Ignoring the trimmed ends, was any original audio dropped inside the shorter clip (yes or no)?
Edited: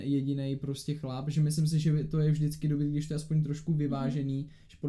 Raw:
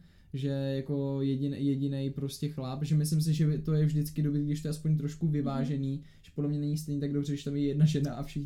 no